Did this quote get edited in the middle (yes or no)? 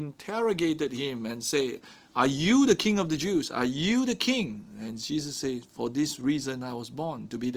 no